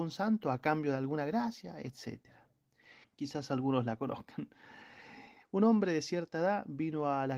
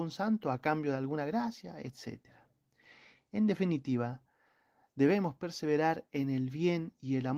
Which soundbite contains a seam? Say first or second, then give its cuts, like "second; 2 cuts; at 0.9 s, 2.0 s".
first; 1 cut; at 3.0 s